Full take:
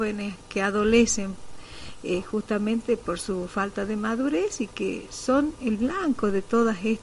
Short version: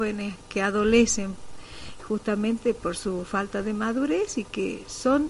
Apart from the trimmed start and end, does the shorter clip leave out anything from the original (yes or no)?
yes